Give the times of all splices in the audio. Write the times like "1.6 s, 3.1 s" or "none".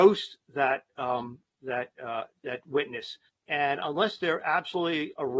3.3 s